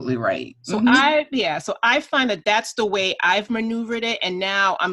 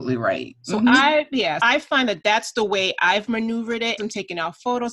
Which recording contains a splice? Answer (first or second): second